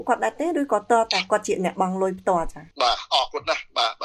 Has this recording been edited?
yes; 1 cut; at 2.7 s

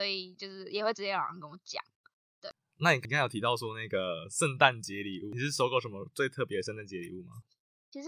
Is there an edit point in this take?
no; 0 cuts

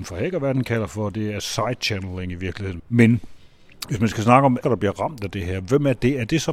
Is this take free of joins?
no; 2 cuts; at 2.8 s, 4.6 s

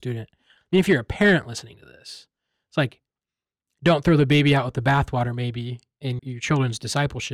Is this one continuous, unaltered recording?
no; 1 cut; at 6.2 s

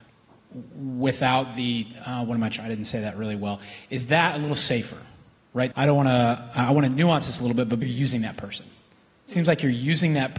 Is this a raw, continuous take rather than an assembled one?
no; 2 cuts; at 5.7 s, 7.8 s

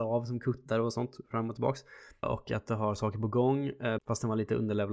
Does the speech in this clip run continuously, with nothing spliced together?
no; 2 cuts; at 2.2 s, 4.0 s

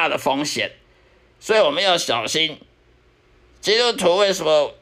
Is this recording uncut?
yes; 0 cuts

